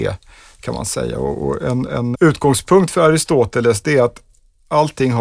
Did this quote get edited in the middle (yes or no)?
yes